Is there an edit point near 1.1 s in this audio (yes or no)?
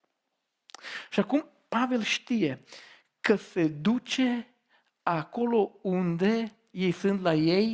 yes